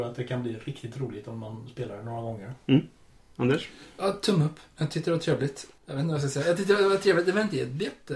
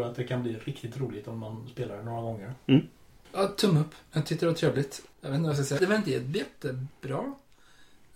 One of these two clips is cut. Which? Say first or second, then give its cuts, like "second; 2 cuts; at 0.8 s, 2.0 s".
second; 2 cuts; at 3.2 s, 5.8 s